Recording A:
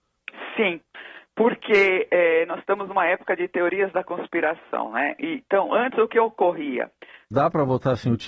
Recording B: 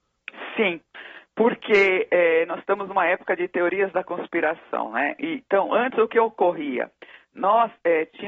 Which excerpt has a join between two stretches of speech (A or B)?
A